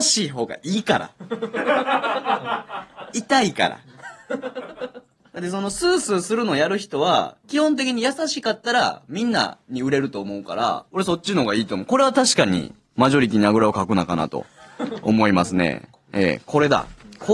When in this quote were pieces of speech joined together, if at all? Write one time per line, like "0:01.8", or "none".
0:07.4
0:10.9